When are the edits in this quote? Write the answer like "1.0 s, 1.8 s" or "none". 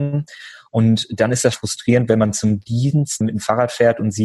1.5 s